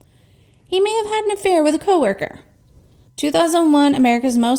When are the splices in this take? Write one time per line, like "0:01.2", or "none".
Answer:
0:03.1